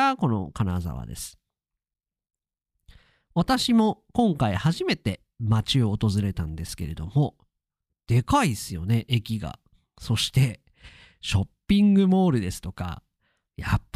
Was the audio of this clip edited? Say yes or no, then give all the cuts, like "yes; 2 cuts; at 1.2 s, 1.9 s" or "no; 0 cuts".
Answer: no; 0 cuts